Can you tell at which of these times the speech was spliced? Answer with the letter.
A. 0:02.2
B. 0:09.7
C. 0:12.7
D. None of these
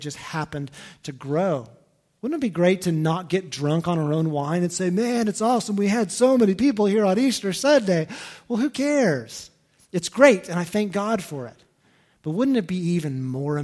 A